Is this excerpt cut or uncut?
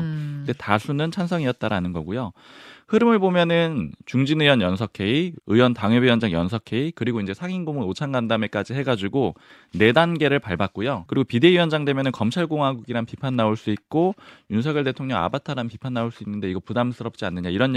cut